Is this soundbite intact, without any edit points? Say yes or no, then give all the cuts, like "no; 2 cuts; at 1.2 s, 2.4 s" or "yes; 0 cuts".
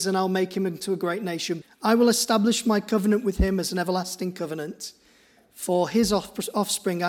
no; 1 cut; at 1.6 s